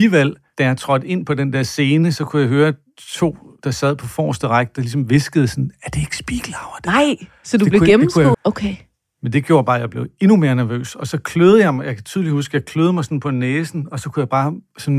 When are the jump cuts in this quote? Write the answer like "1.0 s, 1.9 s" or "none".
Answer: 8.3 s